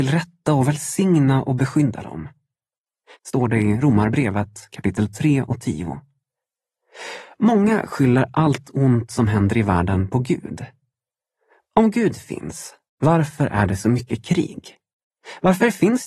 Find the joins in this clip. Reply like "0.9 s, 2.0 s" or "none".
3.1 s